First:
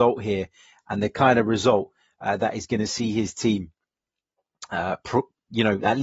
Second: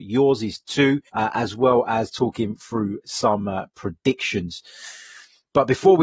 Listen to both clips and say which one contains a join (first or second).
second